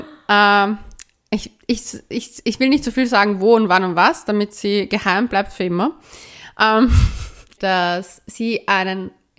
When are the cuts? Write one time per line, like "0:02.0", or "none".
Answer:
0:07.6